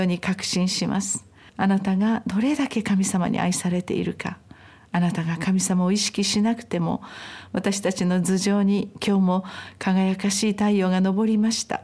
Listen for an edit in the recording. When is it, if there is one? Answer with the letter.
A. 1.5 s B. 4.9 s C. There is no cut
A